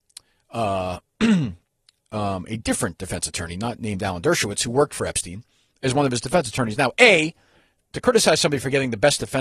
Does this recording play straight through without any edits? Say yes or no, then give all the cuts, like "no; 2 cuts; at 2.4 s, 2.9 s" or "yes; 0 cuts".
yes; 0 cuts